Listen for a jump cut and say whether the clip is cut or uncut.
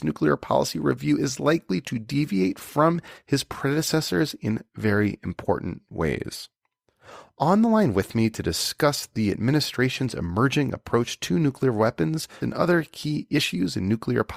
cut